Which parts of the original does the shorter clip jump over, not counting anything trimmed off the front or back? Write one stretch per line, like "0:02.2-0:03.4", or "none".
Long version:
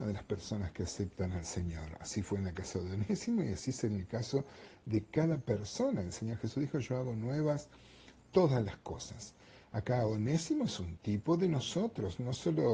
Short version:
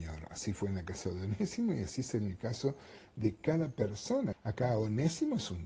0:06.0-0:09.6